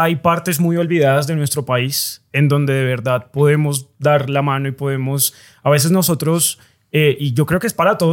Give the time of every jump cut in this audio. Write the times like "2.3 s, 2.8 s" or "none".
none